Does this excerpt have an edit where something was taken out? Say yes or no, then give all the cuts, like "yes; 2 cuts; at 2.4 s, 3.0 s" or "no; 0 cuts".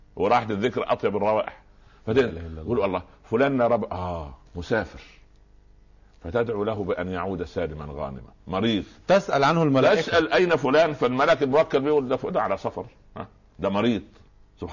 yes; 1 cut; at 4.4 s